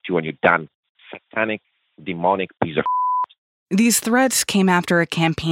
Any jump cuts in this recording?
yes; 1 cut; at 0.9 s

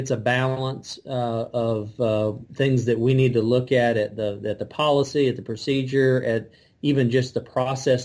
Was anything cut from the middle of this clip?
yes; 1 cut; at 2.5 s

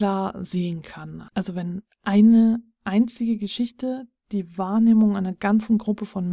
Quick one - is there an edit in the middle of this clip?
no; 0 cuts

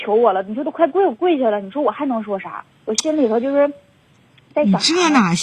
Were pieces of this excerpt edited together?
yes; 1 cut; at 2.7 s

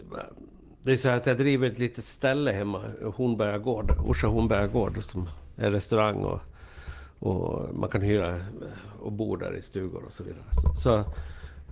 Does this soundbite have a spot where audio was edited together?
no; 0 cuts

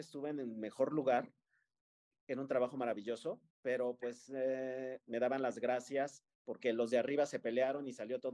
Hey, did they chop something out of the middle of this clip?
yes; 2 cuts; at 3.5 s, 5.0 s

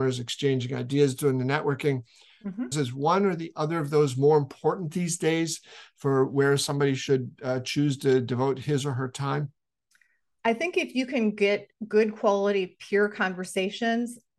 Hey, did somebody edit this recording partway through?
yes; 1 cut; at 2.7 s

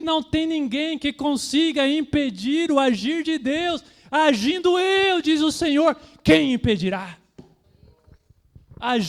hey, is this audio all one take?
yes; 0 cuts

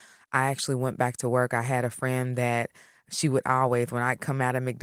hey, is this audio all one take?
yes; 0 cuts

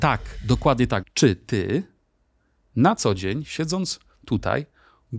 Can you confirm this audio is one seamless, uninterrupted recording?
no; 1 cut; at 1.0 s

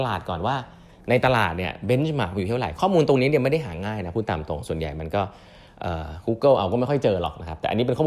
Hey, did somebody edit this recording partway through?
no; 0 cuts

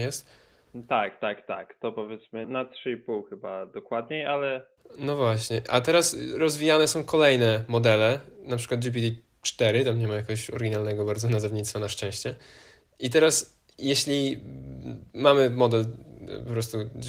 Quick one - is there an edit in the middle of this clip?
yes; 1 cut; at 2.4 s

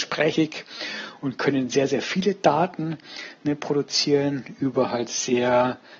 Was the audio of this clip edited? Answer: no; 0 cuts

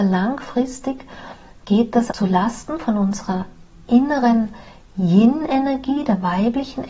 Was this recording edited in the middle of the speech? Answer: yes; 1 cut; at 2.1 s

